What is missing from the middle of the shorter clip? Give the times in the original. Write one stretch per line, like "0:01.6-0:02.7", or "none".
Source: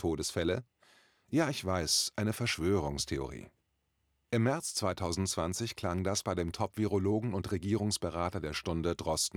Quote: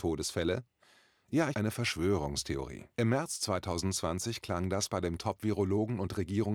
0:01.5-0:02.1
0:03.5-0:04.2